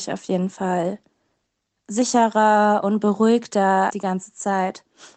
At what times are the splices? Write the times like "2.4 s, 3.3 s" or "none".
3.9 s